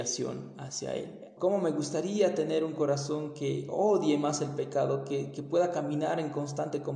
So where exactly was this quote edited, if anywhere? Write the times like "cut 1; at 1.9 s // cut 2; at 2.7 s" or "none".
cut 1; at 1.4 s